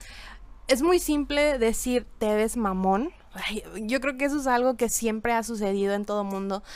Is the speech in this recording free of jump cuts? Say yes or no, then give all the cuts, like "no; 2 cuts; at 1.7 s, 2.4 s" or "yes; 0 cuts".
yes; 0 cuts